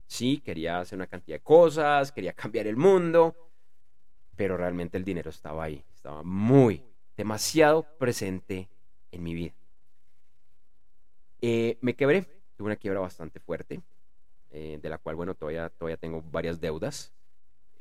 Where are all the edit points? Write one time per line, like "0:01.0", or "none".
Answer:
none